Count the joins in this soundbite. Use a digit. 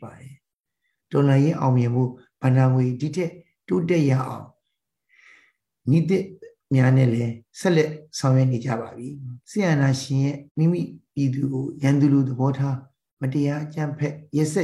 2